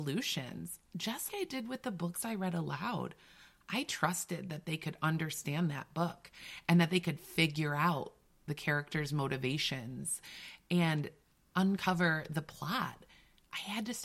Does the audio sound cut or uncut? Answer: cut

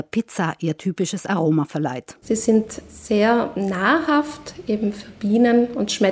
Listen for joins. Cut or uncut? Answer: cut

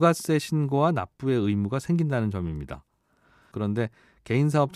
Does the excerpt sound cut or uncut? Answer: cut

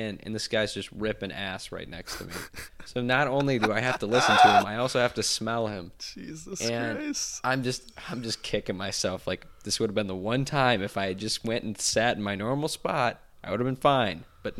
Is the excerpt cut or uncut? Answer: uncut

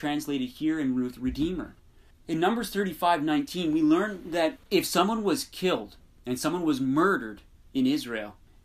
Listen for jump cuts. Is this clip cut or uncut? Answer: cut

